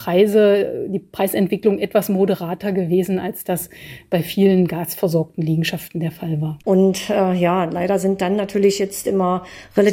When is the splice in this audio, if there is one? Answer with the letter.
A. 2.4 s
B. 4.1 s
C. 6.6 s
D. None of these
C